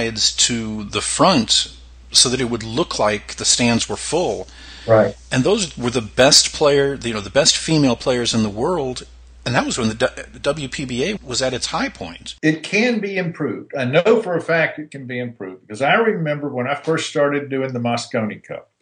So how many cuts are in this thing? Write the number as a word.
two